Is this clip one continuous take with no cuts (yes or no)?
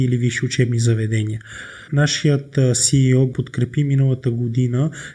no